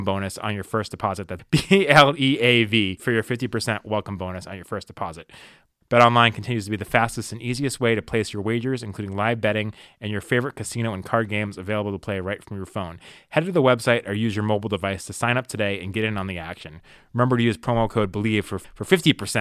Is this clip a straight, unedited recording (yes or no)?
no